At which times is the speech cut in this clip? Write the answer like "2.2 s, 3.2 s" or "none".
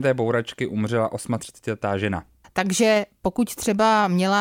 2.4 s